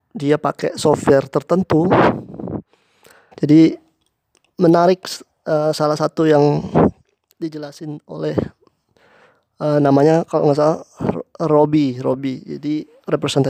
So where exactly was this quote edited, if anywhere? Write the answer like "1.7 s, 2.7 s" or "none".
3.3 s

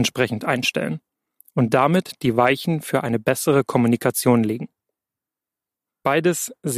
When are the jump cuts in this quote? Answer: 5.9 s

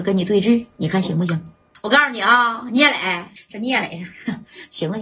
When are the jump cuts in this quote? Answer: 1.7 s, 3.4 s

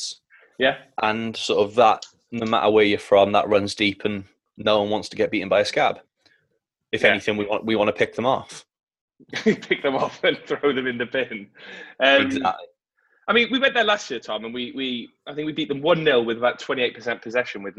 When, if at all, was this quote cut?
none

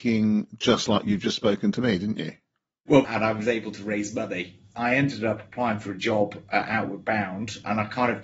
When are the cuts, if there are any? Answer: 3.0 s, 4.7 s

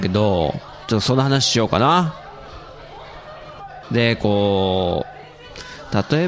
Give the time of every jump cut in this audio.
3.8 s

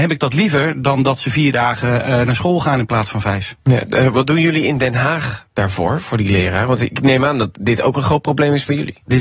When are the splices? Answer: none

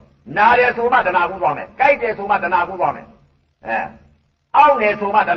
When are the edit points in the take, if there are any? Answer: none

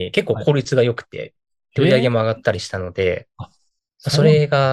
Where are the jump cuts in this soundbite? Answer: none

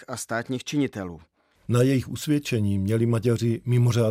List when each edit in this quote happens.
1.6 s

